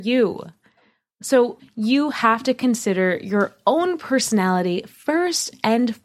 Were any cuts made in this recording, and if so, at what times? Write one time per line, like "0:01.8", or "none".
0:01.6

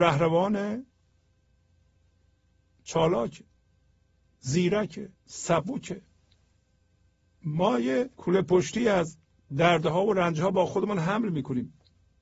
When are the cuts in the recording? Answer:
0:05.2
0:08.1

